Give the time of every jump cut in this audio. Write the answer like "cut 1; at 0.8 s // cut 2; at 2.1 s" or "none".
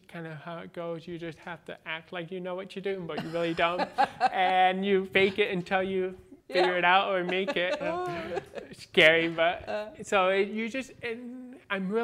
cut 1; at 7.8 s